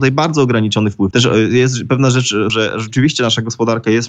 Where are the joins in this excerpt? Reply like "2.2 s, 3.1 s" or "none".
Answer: 1.1 s, 2.5 s

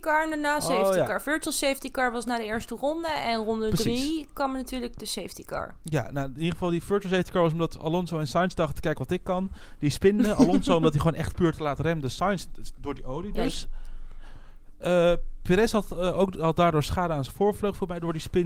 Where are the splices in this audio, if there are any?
none

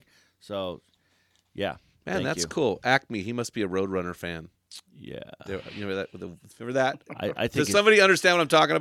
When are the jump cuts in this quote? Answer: none

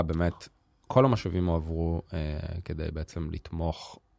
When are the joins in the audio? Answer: none

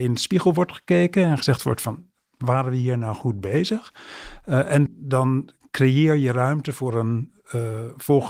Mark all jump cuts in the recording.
4.9 s

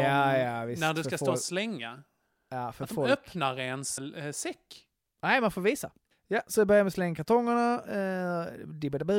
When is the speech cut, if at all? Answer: 4.0 s, 6.1 s

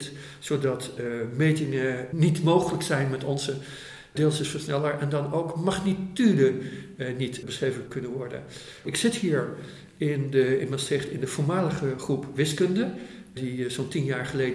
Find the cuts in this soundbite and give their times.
8.8 s

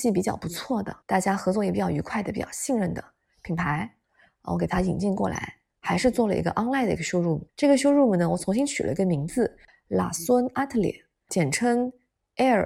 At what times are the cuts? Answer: 1.0 s, 7.5 s

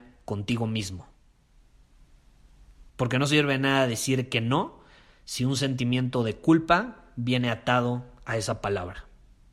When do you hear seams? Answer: 2.9 s

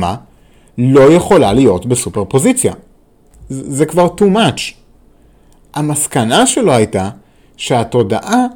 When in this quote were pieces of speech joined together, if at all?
none

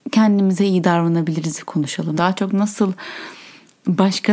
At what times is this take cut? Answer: 2.2 s

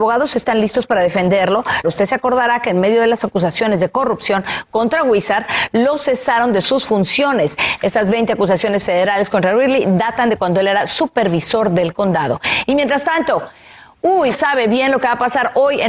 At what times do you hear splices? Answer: 1.8 s, 14.3 s

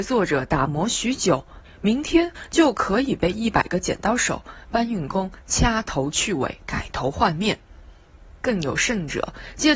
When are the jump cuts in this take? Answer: 1.6 s

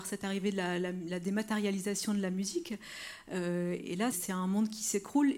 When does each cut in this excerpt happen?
4.1 s

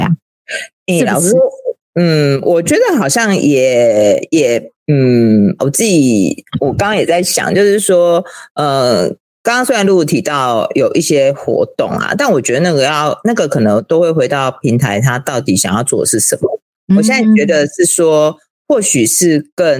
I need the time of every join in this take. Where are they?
5.6 s

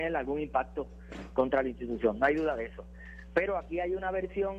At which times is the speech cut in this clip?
none

